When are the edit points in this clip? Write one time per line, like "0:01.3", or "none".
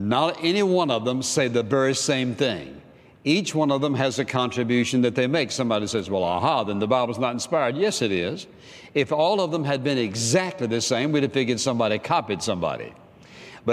none